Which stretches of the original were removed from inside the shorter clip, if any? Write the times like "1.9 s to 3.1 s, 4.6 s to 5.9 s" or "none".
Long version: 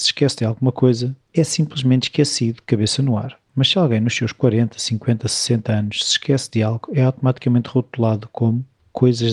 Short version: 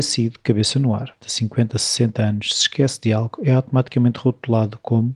3.4 s to 4.7 s